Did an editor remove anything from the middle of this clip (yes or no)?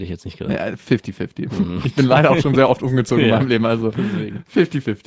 no